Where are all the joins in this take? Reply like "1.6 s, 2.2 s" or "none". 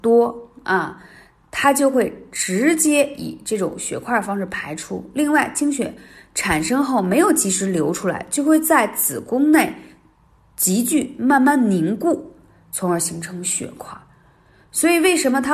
none